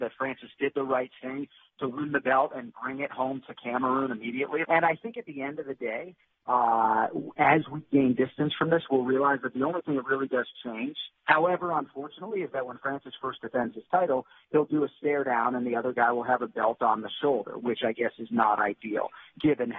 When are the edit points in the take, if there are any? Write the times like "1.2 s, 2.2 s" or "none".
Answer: 4.6 s